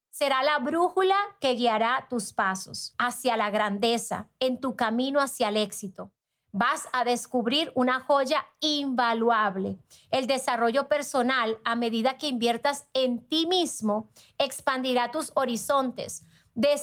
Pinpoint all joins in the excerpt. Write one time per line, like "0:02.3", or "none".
none